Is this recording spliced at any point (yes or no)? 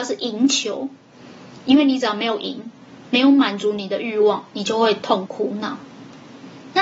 yes